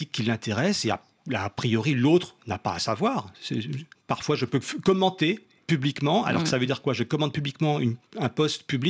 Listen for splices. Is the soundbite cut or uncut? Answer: cut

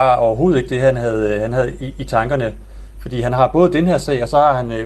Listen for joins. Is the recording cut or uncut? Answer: uncut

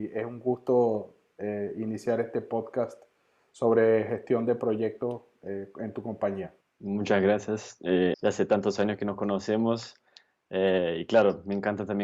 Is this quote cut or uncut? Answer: cut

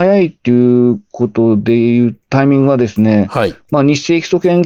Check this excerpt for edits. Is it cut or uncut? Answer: uncut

